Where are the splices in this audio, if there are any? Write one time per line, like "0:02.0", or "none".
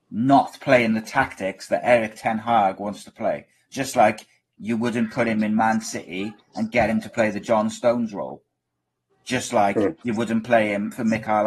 none